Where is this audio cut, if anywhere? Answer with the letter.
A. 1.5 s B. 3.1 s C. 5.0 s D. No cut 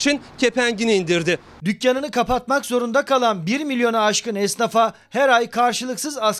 D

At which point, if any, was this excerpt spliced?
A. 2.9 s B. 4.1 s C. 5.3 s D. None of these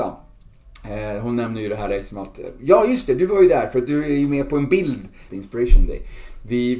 C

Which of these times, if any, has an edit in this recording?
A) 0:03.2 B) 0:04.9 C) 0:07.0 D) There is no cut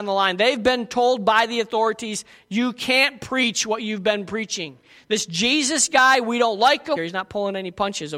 C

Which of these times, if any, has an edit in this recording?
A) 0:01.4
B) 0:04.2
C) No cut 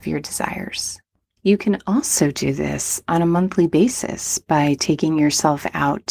A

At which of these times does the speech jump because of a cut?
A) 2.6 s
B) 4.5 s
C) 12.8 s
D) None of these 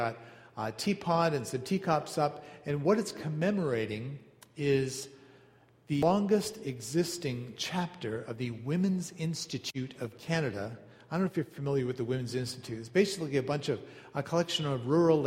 D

